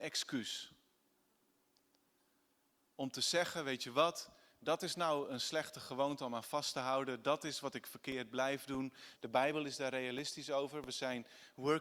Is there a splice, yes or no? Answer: yes